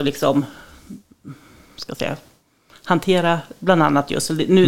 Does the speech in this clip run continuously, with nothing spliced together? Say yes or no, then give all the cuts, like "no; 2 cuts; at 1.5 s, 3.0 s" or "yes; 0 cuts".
yes; 0 cuts